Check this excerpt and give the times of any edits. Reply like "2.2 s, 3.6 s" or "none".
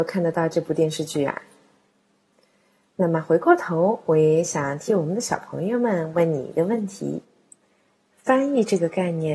none